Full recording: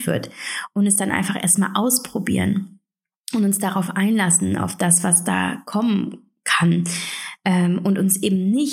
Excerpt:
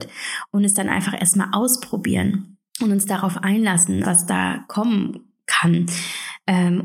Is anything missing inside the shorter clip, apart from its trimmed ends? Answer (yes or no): yes